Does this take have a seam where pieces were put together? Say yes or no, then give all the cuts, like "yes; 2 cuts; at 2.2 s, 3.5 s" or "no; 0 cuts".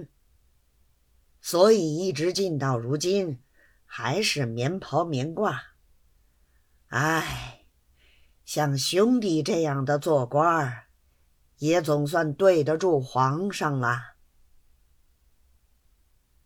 no; 0 cuts